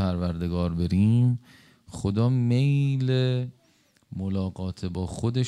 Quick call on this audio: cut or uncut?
uncut